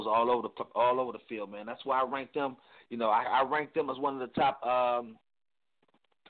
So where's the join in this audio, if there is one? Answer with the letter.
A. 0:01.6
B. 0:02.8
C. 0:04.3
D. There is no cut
C